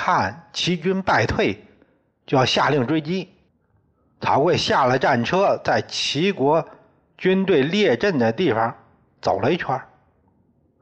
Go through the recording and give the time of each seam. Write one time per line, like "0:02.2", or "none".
0:03.5